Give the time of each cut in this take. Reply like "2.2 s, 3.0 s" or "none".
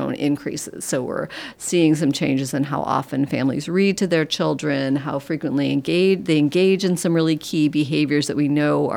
none